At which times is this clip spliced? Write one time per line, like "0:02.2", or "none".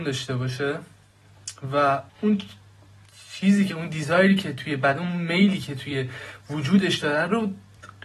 0:02.1